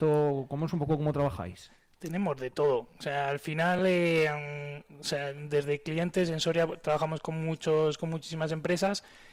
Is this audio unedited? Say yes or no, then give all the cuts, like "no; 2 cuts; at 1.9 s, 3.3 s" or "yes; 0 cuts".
yes; 0 cuts